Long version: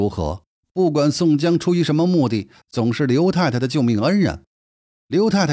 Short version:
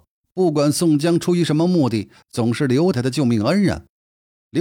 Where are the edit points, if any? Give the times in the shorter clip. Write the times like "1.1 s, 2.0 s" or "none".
2.9 s